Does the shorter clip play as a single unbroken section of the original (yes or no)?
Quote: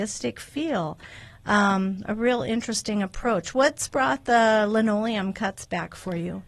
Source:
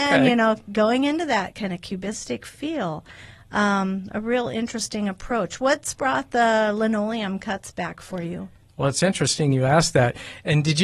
yes